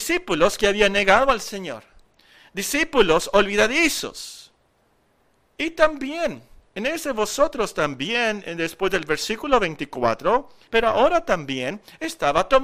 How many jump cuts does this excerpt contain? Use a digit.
2